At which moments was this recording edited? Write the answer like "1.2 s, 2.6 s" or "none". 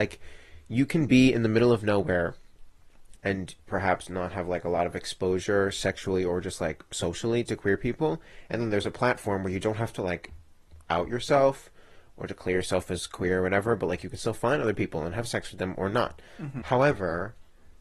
3.1 s, 16.6 s